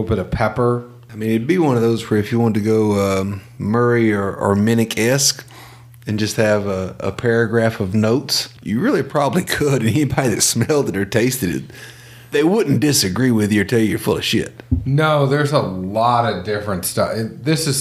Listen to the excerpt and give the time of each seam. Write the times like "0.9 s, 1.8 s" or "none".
8.6 s